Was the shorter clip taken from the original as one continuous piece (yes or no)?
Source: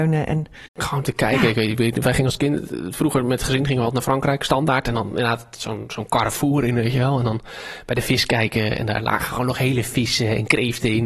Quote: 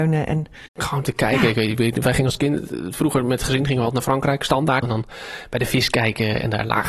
no